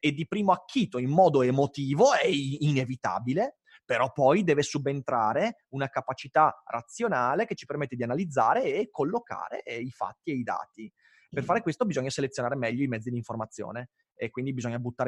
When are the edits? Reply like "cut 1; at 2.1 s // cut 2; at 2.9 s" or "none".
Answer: none